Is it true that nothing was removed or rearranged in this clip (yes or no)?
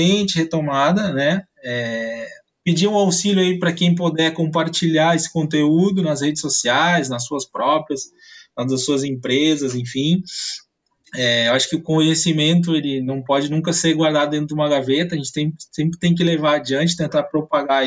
yes